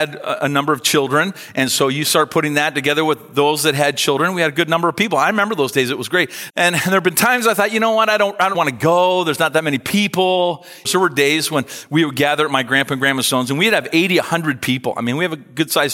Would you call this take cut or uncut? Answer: cut